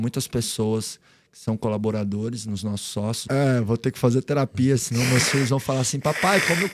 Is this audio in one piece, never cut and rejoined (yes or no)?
no